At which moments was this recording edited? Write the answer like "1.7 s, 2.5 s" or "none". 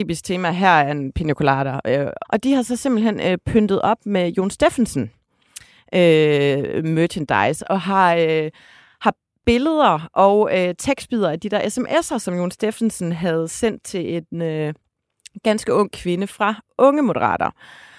2.2 s